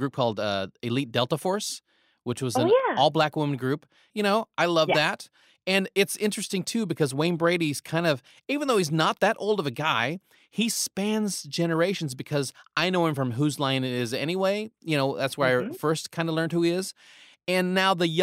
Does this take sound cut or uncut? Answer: cut